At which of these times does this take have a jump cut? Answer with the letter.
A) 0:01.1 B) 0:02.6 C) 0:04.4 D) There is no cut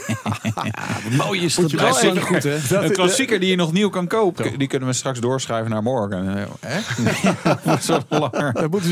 C